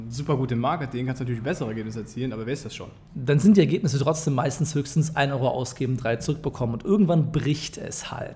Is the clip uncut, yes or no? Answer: yes